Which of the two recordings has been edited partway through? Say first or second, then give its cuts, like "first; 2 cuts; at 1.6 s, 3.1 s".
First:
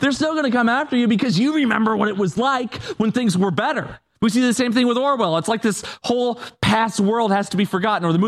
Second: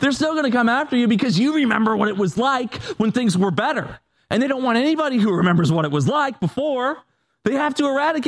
first; 1 cut; at 4.1 s